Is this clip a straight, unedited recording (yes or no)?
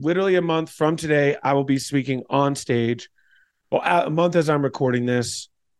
yes